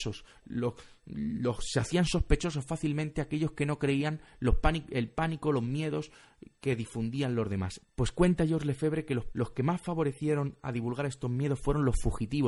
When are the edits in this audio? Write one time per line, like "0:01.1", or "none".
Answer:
0:07.8
0:09.3